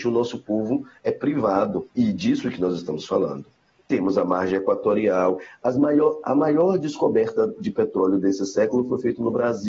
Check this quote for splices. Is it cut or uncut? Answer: cut